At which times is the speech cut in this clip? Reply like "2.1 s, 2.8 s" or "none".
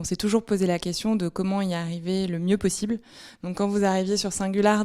none